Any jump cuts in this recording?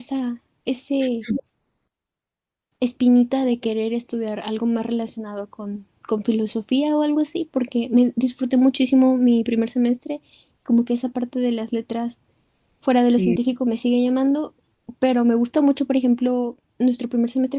no; 0 cuts

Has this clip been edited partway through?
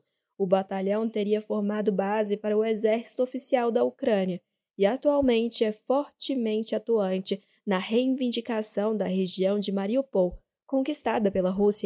no; 0 cuts

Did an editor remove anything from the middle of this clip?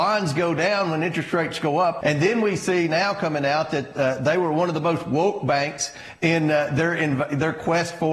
yes; 1 cut; at 2.0 s

